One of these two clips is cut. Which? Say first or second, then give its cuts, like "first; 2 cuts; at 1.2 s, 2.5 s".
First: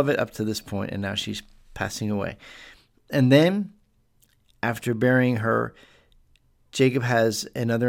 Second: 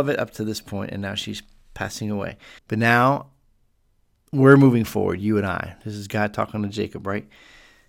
second; 1 cut; at 2.6 s